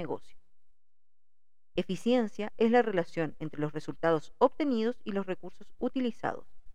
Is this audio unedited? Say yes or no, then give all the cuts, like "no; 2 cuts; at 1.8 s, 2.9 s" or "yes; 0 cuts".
no; 1 cut; at 1.8 s